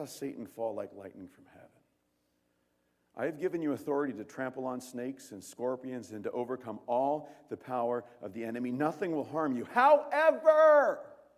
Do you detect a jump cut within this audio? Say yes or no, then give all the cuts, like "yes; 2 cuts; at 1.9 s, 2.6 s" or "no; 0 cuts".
no; 0 cuts